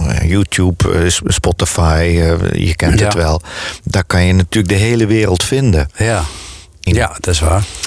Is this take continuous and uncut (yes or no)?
no